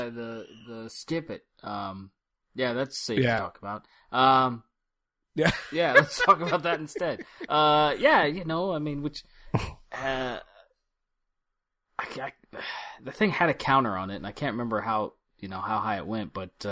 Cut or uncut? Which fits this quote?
uncut